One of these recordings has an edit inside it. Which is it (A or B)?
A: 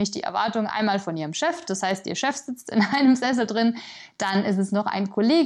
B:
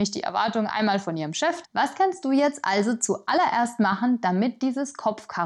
B